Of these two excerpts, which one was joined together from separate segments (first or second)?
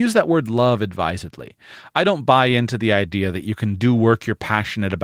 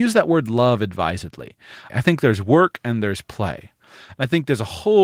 second